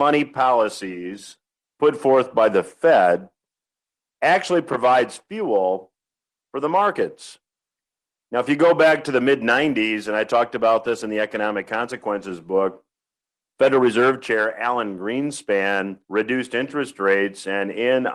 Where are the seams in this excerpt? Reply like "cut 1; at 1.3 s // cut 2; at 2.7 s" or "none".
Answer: cut 1; at 13.5 s // cut 2; at 16.0 s